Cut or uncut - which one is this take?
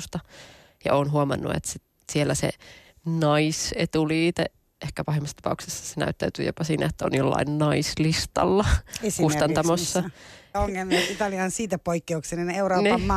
cut